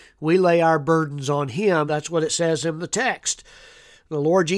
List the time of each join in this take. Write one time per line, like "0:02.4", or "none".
0:01.9